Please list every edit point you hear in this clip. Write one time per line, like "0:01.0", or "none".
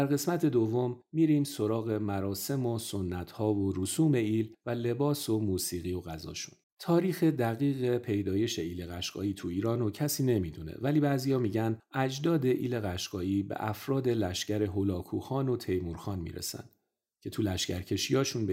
0:06.6